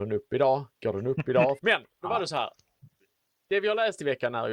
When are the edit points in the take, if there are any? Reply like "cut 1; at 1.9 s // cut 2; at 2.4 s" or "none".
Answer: cut 1; at 1.6 s